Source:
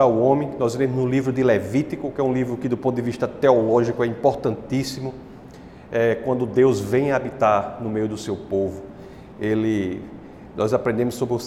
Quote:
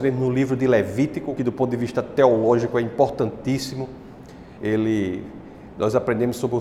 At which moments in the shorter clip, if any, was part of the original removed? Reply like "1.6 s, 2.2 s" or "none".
1.4 s, 4.6 s